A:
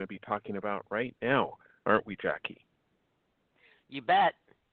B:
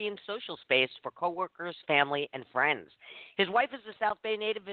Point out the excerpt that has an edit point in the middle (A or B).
B